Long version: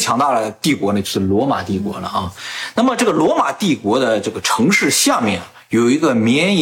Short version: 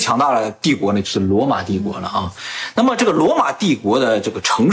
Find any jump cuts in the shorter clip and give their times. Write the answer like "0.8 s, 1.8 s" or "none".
none